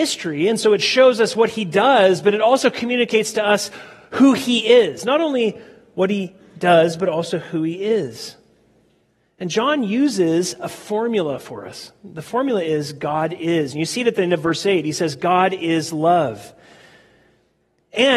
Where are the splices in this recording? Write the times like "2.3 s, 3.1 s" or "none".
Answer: none